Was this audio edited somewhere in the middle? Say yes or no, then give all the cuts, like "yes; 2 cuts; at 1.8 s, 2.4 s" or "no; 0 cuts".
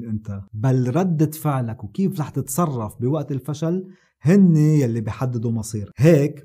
no; 0 cuts